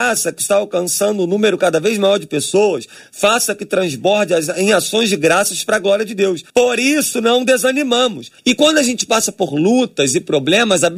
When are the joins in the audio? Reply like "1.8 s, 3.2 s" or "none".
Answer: 6.5 s, 8.4 s